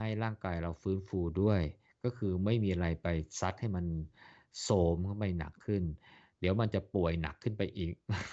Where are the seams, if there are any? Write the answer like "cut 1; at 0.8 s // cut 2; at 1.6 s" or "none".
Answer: none